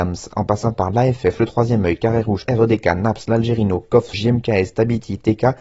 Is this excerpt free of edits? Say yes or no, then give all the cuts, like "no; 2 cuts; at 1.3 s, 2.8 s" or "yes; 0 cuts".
no; 2 cuts; at 2.5 s, 4.1 s